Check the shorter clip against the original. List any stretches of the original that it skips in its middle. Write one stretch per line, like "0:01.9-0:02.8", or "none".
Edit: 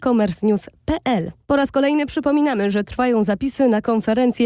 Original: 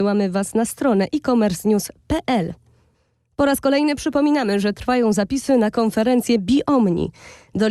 0:02.6-0:03.3